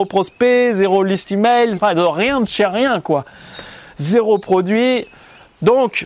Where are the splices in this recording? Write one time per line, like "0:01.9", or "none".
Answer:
0:01.8